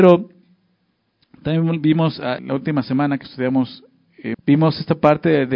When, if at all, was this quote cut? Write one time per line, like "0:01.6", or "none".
0:02.4
0:04.3